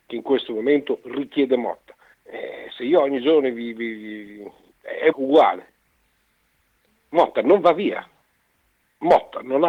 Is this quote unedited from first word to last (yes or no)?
no